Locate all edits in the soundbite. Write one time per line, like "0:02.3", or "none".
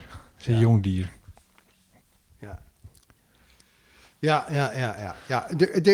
none